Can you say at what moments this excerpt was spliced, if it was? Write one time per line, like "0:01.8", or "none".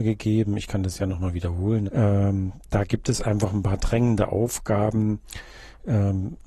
0:01.9